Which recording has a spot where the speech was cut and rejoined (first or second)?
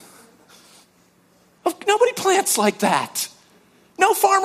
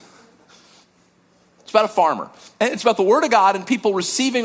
second